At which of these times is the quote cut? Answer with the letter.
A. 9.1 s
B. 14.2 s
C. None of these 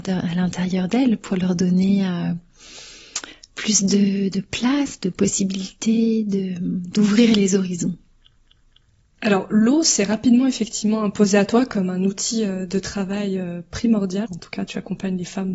B